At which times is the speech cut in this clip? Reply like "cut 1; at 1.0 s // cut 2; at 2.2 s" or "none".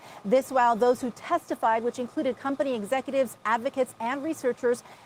none